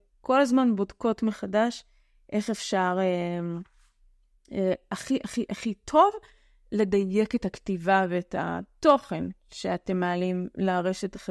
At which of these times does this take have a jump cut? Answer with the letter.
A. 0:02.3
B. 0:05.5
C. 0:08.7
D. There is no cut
B